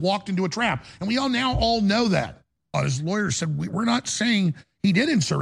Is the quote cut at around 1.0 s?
no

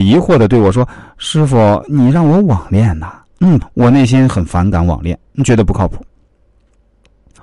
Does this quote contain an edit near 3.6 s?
yes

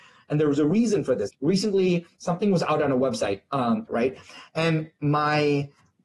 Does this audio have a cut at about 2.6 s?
no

